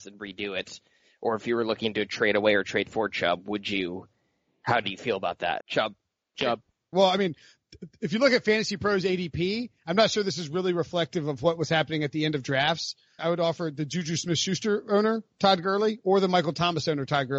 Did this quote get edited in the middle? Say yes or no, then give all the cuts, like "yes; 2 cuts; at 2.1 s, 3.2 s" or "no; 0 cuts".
yes; 3 cuts; at 5.6 s, 6.9 s, 13.2 s